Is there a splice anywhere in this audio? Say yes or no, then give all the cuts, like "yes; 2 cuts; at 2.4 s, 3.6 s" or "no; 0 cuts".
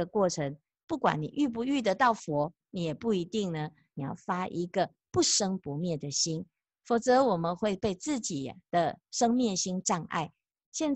yes; 2 cuts; at 2.6 s, 3.9 s